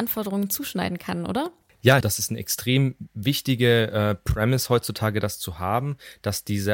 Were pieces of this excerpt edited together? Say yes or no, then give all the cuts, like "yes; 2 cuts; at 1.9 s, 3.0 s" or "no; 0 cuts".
yes; 1 cut; at 2.0 s